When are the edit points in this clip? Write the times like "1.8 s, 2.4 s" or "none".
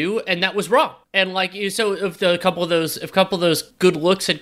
none